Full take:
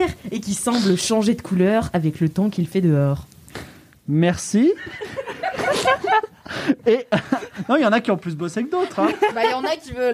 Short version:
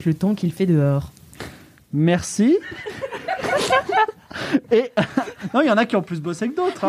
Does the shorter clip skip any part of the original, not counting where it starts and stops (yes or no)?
no